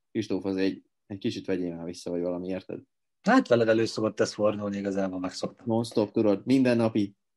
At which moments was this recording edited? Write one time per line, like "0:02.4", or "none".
none